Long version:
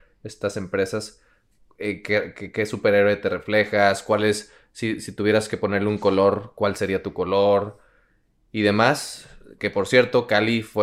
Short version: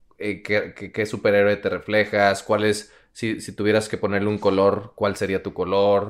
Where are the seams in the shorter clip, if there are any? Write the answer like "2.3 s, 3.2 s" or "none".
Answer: none